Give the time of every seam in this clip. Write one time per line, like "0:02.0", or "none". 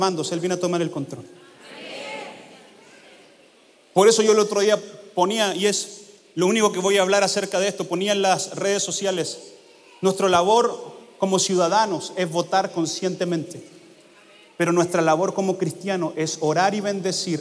none